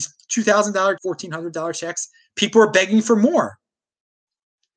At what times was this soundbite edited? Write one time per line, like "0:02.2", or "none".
0:01.0